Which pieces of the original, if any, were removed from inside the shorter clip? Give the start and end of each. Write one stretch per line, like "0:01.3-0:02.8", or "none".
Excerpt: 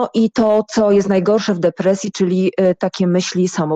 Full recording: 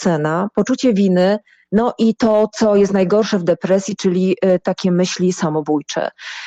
none